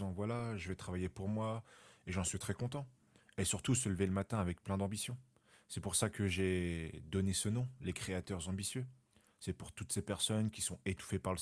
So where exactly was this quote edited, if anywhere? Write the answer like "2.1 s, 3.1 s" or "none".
none